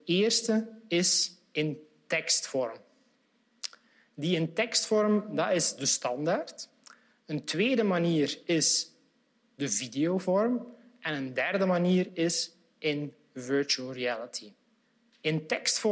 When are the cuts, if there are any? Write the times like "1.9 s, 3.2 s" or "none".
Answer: none